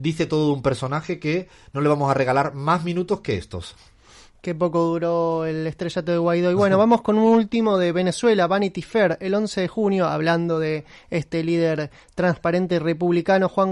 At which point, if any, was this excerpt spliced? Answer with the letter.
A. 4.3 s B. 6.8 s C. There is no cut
C